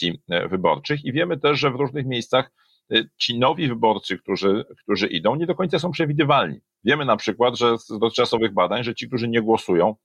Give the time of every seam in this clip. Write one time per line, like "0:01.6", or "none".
0:06.8